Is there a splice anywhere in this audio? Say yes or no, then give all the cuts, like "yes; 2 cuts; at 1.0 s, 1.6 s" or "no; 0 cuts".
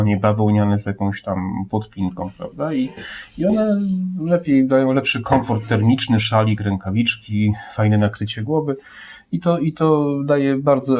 no; 0 cuts